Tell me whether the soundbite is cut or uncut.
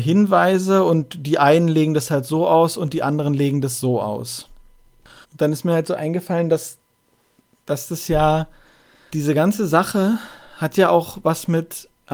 cut